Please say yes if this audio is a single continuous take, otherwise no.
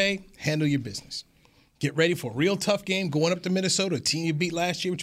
yes